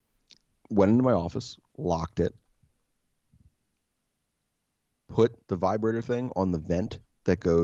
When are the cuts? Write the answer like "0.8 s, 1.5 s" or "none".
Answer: 1.7 s, 5.4 s